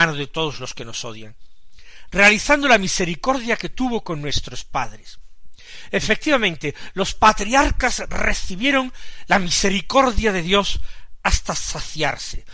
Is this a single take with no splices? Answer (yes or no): yes